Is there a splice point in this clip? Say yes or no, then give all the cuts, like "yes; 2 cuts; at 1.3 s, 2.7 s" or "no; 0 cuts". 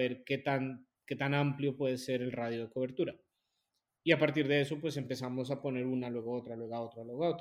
no; 0 cuts